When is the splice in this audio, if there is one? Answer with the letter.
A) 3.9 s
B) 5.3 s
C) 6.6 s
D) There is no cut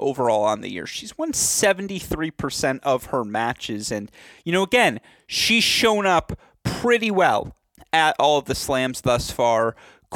D